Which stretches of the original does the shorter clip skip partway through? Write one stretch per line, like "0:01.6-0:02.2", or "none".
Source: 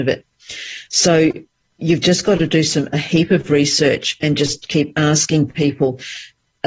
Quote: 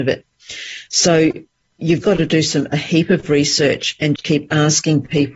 0:02.0-0:02.2
0:04.4-0:04.6